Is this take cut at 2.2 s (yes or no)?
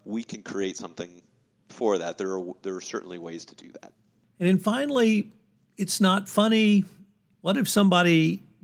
no